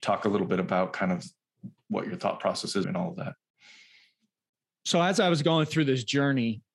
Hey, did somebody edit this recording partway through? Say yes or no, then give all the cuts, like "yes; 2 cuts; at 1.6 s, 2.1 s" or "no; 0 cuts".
yes; 1 cut; at 2.8 s